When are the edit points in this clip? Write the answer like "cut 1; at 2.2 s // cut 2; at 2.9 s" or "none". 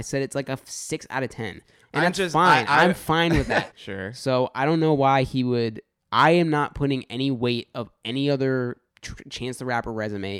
cut 1; at 3.7 s // cut 2; at 6.0 s // cut 3; at 8.9 s